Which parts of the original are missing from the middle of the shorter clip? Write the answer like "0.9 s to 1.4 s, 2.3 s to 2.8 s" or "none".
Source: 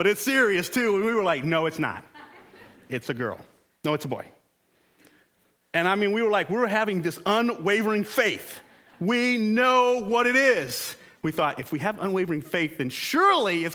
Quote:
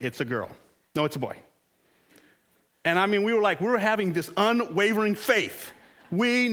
none